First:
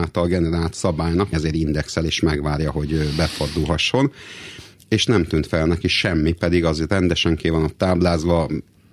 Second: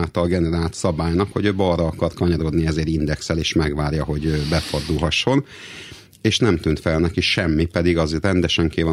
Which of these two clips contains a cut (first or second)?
first